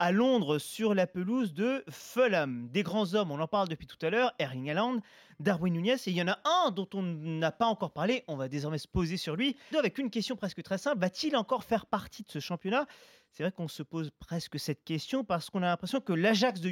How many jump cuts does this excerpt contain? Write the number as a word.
one